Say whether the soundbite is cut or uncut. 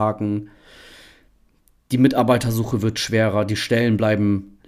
uncut